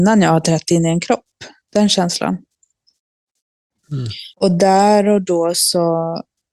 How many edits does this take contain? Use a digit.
1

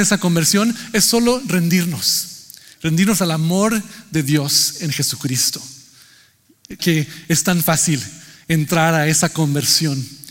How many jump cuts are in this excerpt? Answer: 1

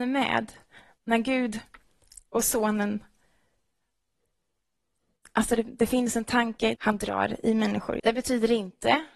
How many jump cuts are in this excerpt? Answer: 2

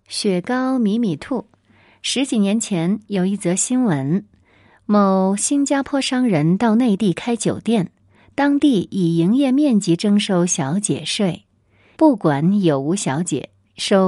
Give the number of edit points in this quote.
1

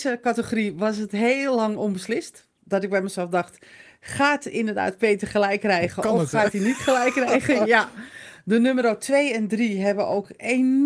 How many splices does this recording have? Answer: 0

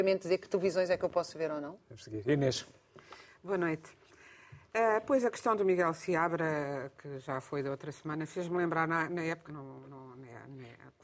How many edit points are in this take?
1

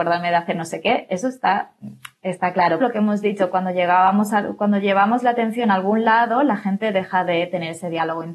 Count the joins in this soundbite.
1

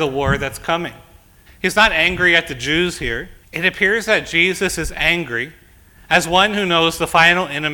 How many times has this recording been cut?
2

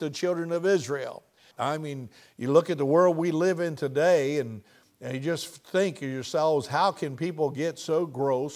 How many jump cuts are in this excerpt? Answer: 1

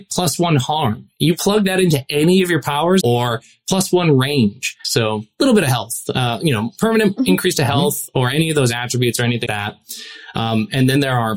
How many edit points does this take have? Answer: 3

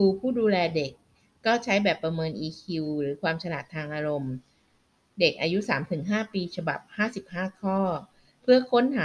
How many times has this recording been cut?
0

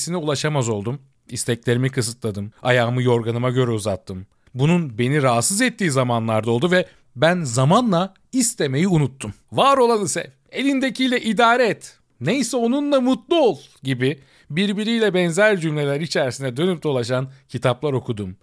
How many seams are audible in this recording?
1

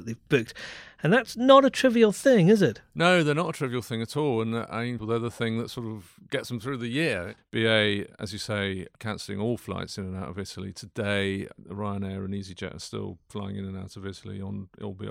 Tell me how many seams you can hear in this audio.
2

